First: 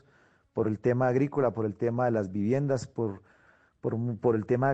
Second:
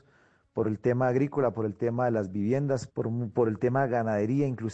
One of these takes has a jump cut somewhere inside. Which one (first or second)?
second